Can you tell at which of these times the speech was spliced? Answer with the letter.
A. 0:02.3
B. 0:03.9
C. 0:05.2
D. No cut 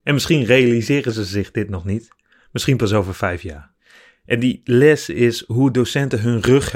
D